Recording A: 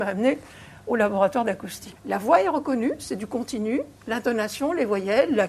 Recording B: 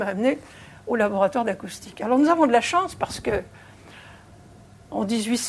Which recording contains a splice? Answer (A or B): A